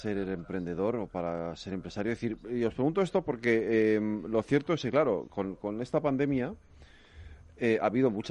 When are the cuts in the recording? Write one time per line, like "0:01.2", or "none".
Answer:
none